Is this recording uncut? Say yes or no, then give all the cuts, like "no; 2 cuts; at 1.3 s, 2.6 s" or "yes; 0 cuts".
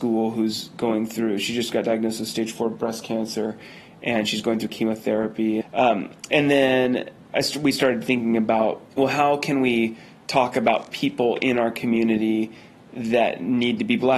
no; 2 cuts; at 5.6 s, 8.9 s